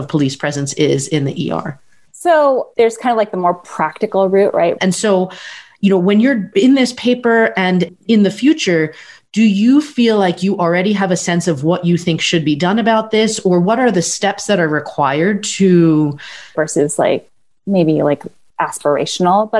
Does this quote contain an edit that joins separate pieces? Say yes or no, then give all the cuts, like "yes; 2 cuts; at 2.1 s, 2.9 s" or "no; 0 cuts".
yes; 2 cuts; at 4.8 s, 16.5 s